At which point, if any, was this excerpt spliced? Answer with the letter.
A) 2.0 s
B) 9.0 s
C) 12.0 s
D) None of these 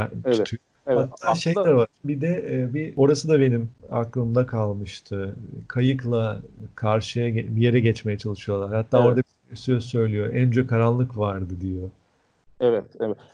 A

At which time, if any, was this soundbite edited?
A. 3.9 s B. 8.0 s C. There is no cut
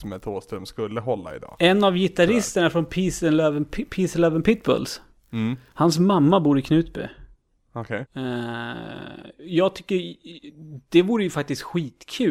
B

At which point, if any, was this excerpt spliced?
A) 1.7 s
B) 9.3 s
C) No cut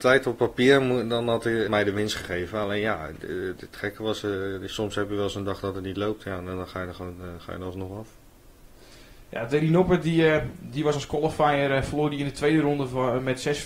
A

